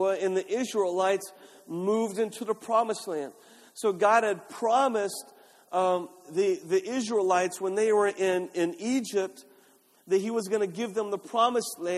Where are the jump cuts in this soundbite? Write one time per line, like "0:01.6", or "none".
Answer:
none